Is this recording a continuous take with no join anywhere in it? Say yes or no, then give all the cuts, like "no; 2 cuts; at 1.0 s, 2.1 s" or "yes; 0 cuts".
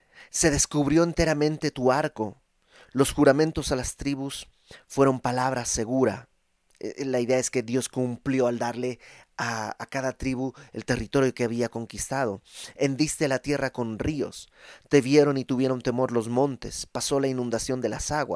yes; 0 cuts